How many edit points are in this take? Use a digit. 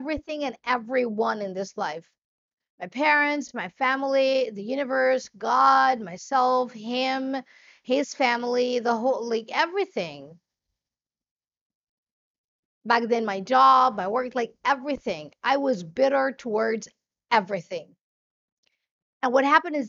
0